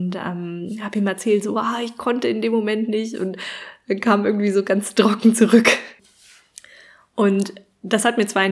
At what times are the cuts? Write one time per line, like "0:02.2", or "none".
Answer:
0:06.0